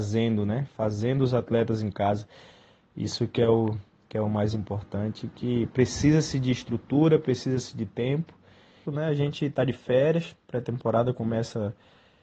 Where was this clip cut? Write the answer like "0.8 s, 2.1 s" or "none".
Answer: 8.8 s, 10.4 s